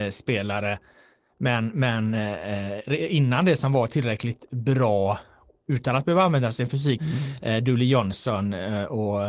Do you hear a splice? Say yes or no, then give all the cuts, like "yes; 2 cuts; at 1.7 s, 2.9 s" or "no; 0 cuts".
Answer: yes; 1 cut; at 7.0 s